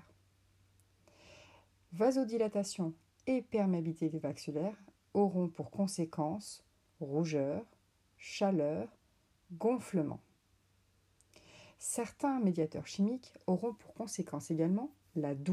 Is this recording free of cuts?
yes; 0 cuts

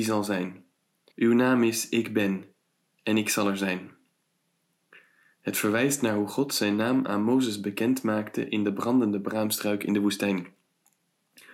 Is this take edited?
yes; 1 cut; at 1.1 s

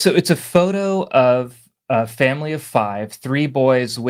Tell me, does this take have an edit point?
no; 0 cuts

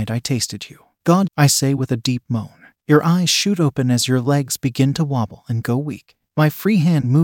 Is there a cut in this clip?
yes; 2 cuts; at 1.3 s, 2.8 s

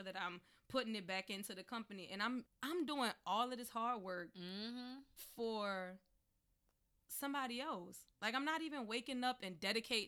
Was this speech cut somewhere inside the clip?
yes; 1 cut; at 2.5 s

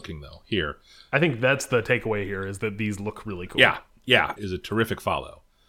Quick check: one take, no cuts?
no; 1 cut; at 4.4 s

